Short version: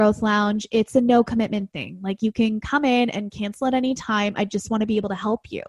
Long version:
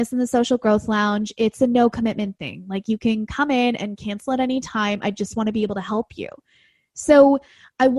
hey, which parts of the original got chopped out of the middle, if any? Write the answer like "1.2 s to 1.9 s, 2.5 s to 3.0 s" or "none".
none